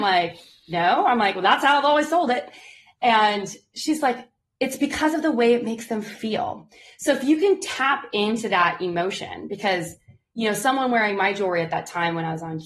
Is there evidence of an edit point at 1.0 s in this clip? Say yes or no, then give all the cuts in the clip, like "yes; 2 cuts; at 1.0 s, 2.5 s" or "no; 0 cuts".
no; 0 cuts